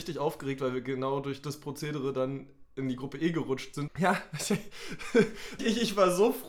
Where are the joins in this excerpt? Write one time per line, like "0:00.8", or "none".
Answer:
0:03.9
0:05.6